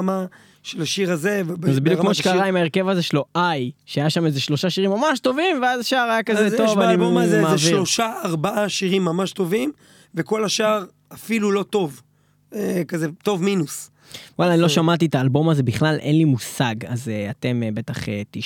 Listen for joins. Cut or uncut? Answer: uncut